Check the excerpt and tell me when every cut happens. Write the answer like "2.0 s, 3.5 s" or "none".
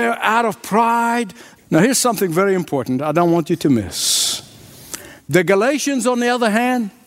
1.6 s, 5.2 s